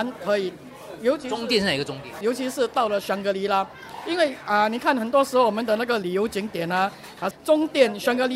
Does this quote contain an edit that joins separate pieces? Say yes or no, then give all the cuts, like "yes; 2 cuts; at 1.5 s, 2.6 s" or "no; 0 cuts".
yes; 2 cuts; at 2.2 s, 7.3 s